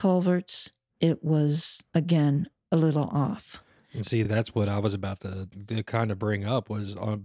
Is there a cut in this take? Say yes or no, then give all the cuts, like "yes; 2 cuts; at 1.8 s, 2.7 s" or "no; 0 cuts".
no; 0 cuts